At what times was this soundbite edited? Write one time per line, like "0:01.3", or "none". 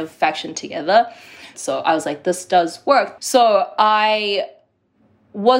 0:01.5
0:03.2

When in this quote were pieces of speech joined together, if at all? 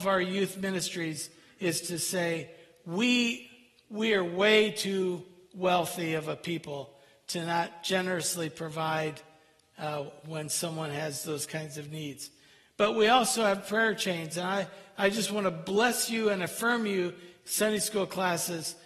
none

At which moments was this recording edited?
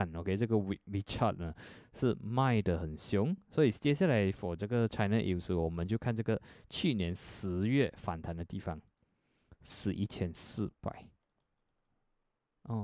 none

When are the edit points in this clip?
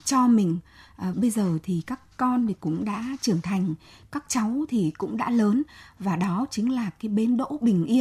0:01.1

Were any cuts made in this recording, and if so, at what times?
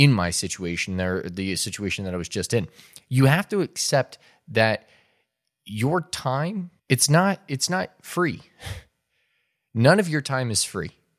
0:06.8

